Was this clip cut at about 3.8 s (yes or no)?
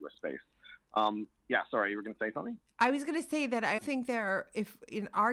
yes